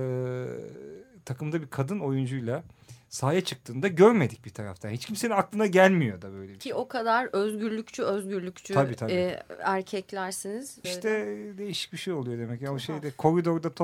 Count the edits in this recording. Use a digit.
1